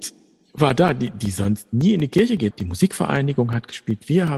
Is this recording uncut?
no; 1 cut; at 2.5 s

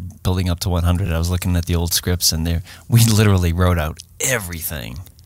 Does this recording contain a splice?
no; 0 cuts

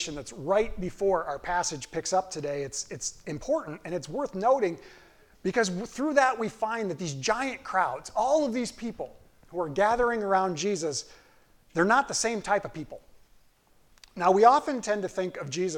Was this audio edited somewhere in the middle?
no; 0 cuts

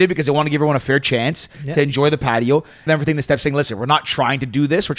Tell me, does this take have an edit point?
yes; 1 cut; at 2.9 s

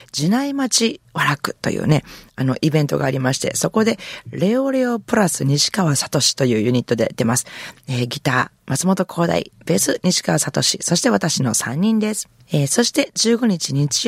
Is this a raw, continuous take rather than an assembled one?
yes; 0 cuts

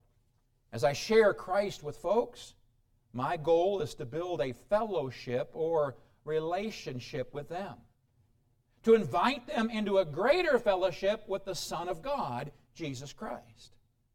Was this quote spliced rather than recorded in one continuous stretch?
no; 0 cuts

